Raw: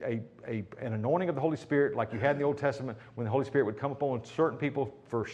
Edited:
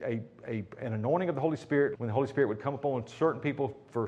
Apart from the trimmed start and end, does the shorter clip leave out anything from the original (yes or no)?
yes